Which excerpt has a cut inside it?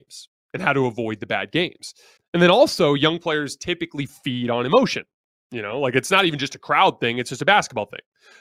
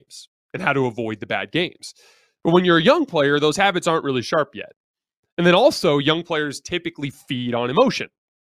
first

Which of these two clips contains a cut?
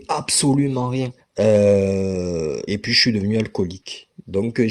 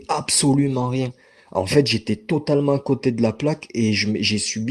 first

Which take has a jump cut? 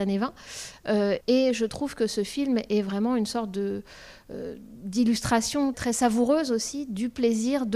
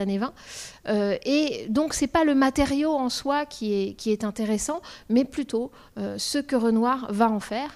first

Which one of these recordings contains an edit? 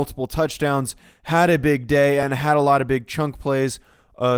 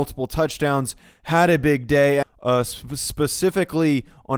second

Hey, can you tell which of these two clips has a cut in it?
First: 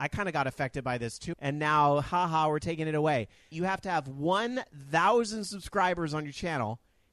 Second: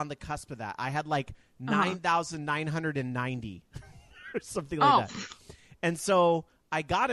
first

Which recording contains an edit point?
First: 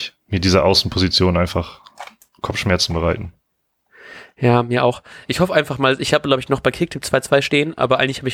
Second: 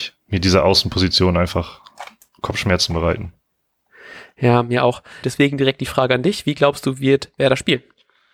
second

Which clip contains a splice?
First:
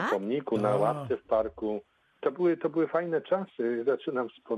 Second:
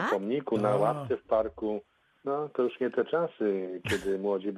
first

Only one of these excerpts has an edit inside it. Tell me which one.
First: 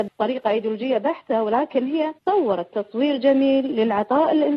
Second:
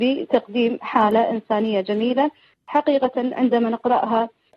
first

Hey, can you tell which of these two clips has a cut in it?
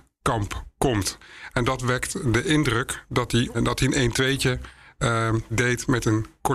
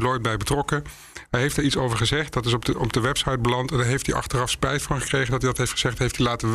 first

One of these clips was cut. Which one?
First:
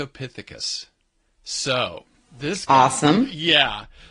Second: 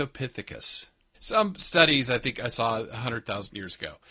second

